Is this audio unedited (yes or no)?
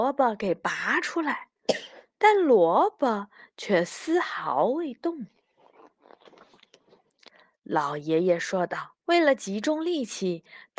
no